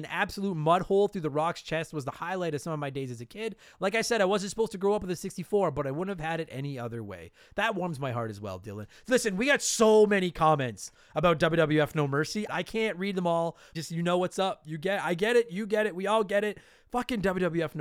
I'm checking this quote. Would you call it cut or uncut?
cut